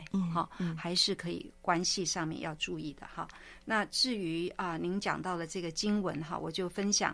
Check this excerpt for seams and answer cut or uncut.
uncut